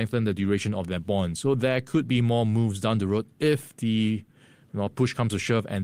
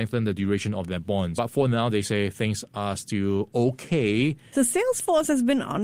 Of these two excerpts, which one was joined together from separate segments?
second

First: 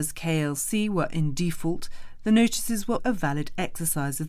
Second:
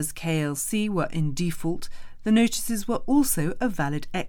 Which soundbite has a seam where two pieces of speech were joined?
first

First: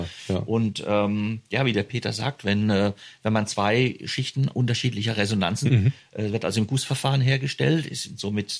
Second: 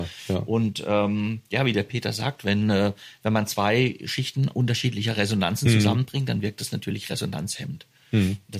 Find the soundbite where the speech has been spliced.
first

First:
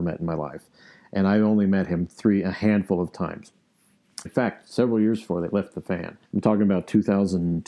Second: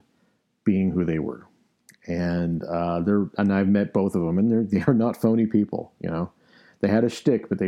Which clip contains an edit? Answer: first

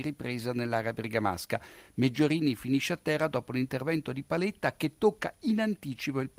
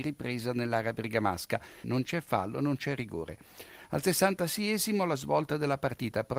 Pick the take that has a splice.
second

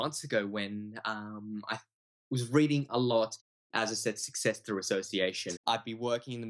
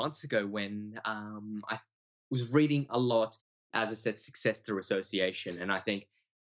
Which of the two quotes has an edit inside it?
first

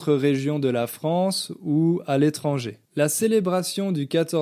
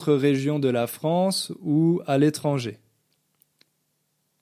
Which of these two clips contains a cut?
first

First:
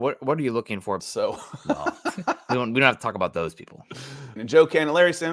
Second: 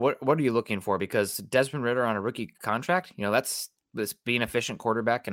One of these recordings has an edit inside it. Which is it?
first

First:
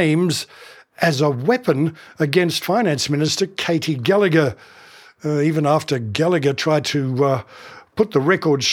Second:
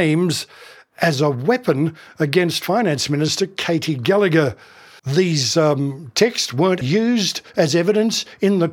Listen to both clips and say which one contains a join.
second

